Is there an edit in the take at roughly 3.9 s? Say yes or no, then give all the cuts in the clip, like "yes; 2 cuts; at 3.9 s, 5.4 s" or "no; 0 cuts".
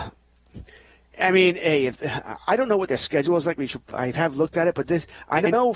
yes; 1 cut; at 3.9 s